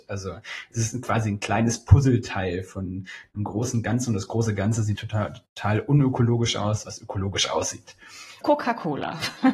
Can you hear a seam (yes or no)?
yes